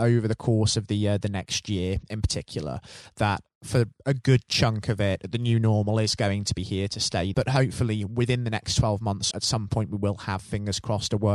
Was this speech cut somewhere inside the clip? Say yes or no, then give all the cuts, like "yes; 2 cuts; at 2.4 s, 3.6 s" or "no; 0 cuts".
yes; 2 cuts; at 7.3 s, 9.3 s